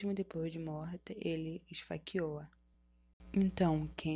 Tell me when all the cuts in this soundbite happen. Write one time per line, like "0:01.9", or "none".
none